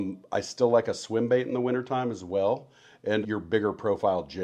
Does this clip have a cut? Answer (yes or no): yes